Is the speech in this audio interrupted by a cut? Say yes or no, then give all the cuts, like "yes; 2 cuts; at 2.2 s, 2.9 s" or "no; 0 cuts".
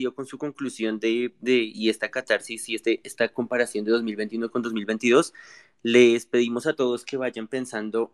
no; 0 cuts